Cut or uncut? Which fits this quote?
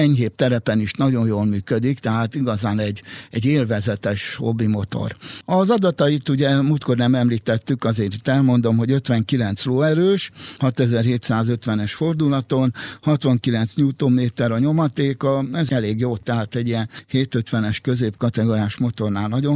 uncut